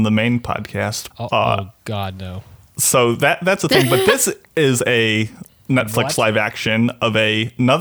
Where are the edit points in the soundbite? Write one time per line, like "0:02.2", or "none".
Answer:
0:01.1